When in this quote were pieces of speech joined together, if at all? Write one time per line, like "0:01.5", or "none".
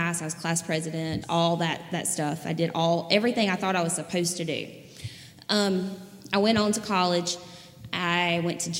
0:01.2